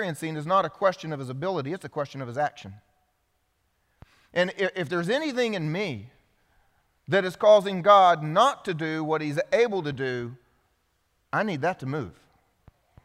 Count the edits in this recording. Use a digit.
0